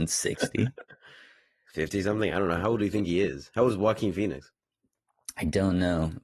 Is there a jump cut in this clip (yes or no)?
no